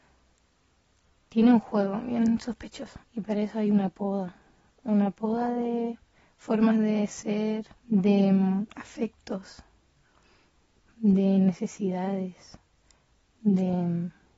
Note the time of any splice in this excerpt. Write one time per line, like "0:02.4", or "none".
0:03.0
0:07.8